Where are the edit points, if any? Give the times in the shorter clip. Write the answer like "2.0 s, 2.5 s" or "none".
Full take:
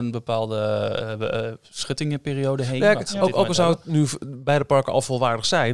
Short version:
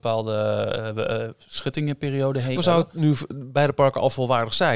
2.6 s